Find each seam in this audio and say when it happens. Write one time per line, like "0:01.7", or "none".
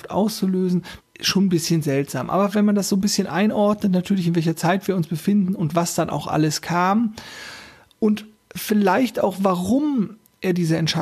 0:01.0

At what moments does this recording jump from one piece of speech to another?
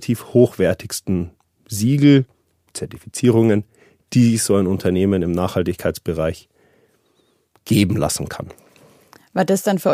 none

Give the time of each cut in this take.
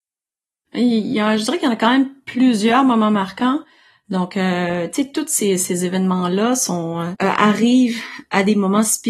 0:07.1

